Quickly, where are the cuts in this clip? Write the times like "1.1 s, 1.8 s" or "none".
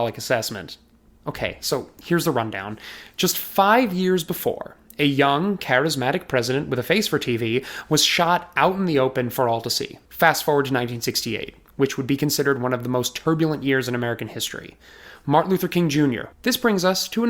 1.1 s, 10.0 s, 16.3 s